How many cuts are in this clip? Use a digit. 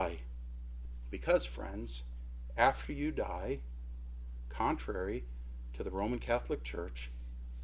0